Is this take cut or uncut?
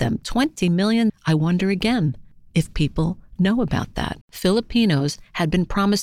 cut